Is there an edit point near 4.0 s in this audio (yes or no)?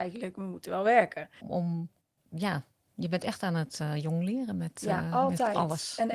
no